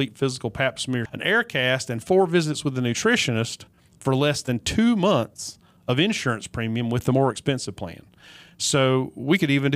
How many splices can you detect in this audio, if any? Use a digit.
1